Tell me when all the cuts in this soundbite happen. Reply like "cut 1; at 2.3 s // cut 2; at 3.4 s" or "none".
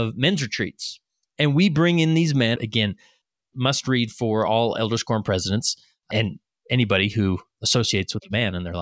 cut 1; at 2.6 s